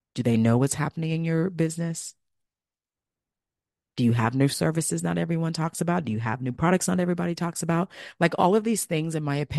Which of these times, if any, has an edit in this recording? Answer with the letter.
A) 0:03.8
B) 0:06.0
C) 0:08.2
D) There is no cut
D